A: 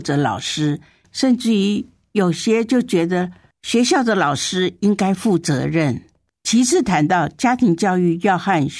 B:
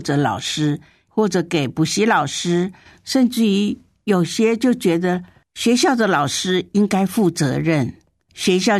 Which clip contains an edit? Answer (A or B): A